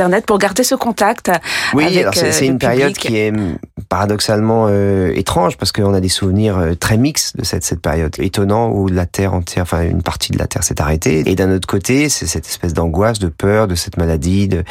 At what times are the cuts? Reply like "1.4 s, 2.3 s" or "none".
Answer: 8.2 s, 11.2 s